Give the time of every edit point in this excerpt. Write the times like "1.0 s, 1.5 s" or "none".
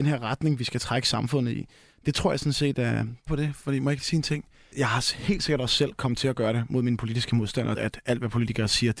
3.3 s, 4.7 s, 7.7 s